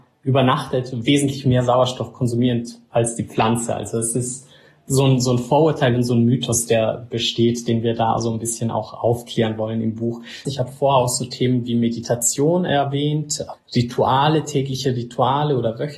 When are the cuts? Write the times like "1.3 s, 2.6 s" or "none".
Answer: 10.4 s